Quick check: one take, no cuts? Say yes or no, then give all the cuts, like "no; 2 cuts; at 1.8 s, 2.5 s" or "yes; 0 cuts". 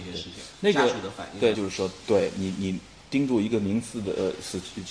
no; 1 cut; at 1.5 s